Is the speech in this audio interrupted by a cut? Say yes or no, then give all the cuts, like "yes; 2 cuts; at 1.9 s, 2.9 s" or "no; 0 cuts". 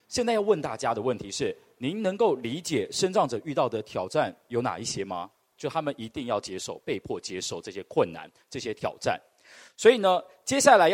yes; 1 cut; at 5.6 s